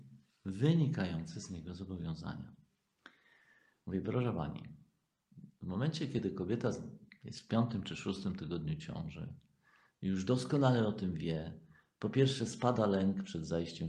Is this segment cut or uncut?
uncut